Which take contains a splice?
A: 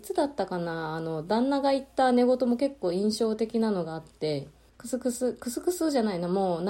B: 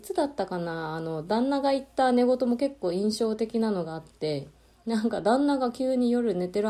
A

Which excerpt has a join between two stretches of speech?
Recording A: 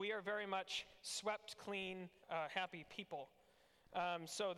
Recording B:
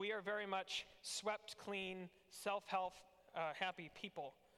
A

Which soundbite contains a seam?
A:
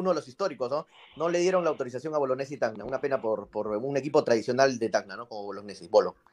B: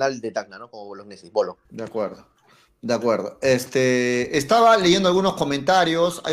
B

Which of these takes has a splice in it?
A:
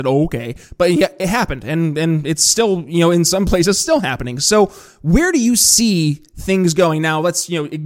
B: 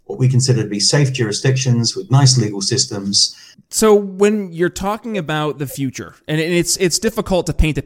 B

